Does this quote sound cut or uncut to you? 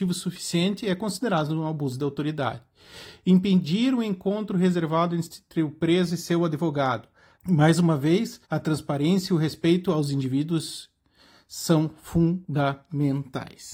cut